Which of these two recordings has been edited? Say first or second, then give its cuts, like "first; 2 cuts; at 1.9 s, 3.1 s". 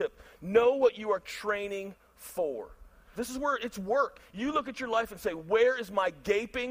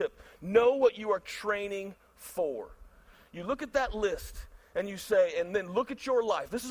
first; 2 cuts; at 3.1 s, 4.2 s